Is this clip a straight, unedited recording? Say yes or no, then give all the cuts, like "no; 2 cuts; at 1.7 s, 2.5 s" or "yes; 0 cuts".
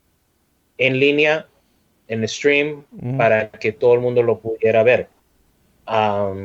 yes; 0 cuts